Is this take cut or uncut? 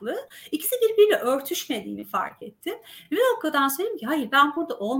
uncut